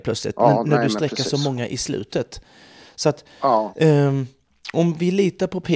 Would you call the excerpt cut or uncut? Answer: uncut